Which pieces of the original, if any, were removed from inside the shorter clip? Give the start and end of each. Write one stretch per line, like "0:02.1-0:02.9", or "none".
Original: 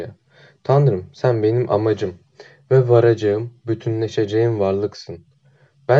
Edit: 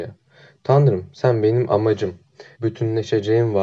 0:02.6-0:03.6